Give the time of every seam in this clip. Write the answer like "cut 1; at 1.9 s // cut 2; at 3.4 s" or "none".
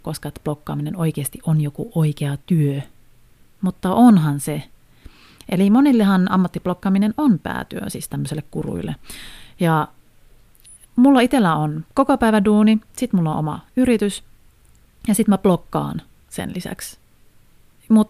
cut 1; at 10.8 s